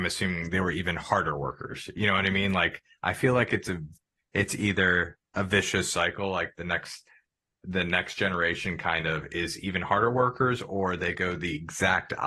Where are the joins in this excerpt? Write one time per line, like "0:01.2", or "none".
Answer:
none